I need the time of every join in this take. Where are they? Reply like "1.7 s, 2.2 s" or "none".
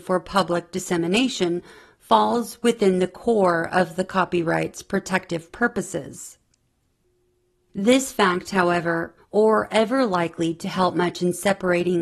9.2 s